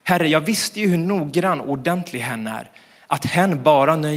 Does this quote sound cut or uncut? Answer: uncut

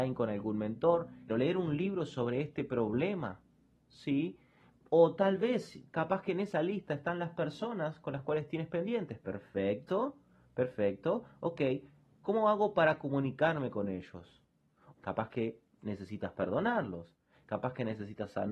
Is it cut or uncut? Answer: cut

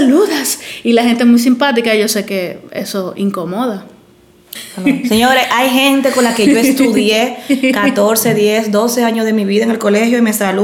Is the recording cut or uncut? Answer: cut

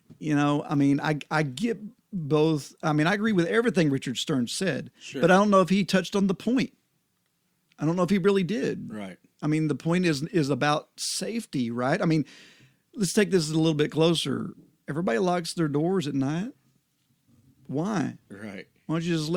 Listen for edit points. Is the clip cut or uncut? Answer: uncut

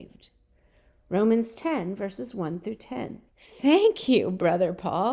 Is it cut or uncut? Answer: cut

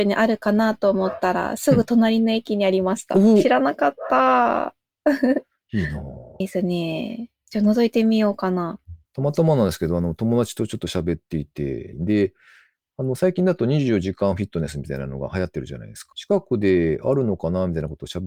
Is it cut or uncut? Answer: cut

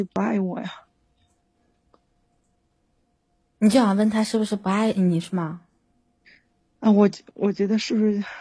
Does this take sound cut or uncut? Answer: uncut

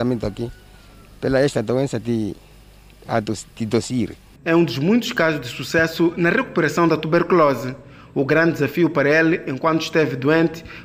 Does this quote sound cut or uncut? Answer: cut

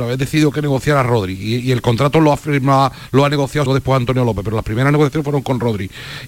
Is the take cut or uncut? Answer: cut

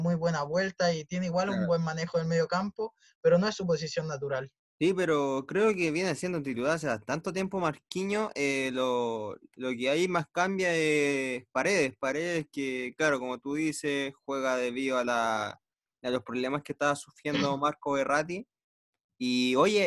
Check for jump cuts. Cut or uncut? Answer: uncut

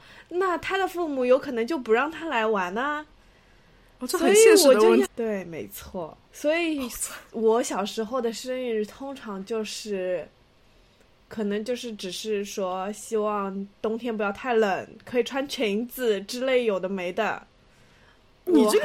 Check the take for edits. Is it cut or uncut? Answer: cut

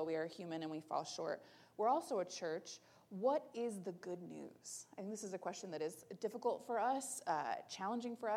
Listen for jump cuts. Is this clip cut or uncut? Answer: uncut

